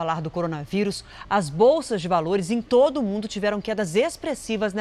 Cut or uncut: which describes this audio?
uncut